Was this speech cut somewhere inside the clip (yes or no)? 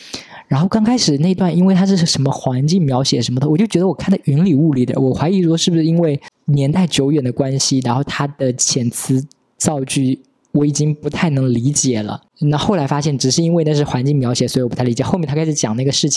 no